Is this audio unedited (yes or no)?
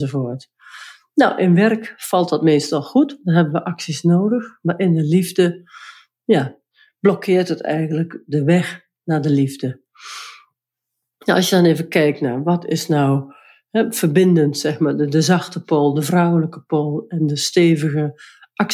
yes